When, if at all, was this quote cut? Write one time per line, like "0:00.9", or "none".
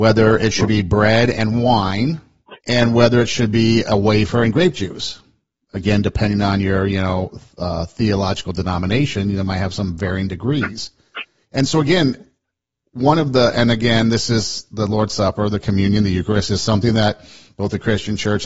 0:02.6